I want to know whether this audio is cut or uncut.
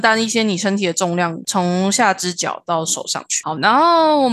cut